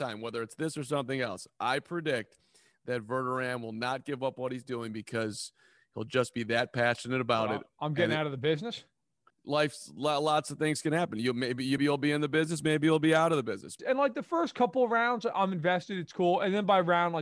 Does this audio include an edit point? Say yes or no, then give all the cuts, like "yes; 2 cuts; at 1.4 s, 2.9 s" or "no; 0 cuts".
yes; 3 cuts; at 9.3 s, 11.8 s, 13.8 s